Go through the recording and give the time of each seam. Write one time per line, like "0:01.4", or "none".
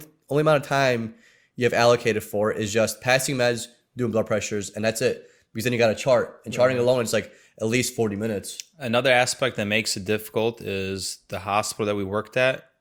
none